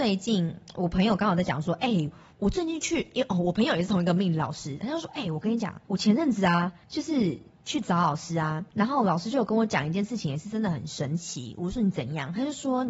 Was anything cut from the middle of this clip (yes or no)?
no